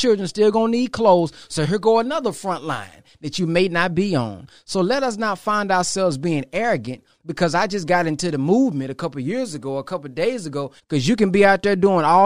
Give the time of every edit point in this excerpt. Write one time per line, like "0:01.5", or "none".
0:10.8